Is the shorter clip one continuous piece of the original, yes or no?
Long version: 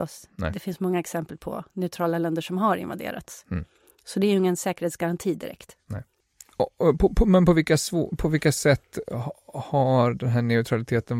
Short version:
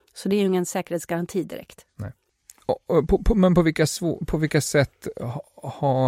yes